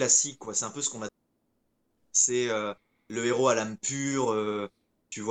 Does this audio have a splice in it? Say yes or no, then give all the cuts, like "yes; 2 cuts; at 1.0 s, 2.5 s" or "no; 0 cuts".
no; 0 cuts